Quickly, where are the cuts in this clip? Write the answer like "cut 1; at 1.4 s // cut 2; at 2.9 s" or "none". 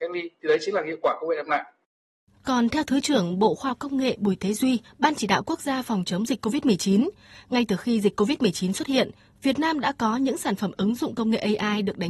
cut 1; at 4.8 s

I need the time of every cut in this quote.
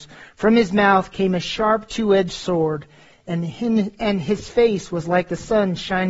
none

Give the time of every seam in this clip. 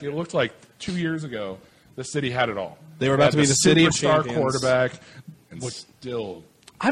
cut 1; at 5.3 s

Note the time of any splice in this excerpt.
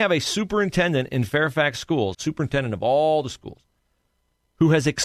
cut 1; at 2.1 s

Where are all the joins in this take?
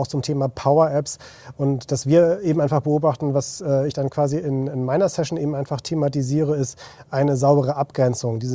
none

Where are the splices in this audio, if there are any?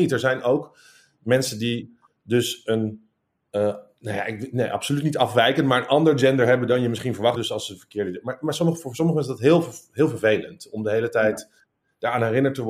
cut 1; at 7.4 s

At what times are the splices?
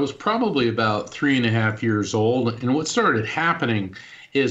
none

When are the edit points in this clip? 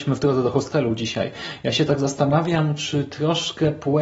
none

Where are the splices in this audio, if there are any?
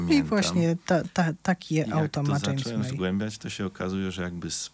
none

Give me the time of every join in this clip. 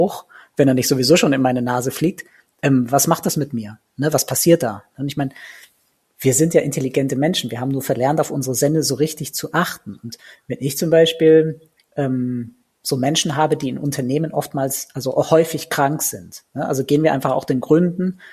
none

